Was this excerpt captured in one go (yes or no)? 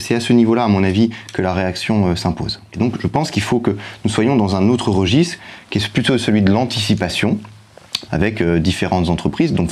no